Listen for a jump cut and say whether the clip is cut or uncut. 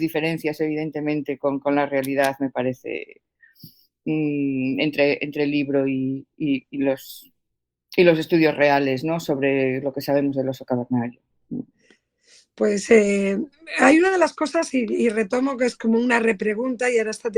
uncut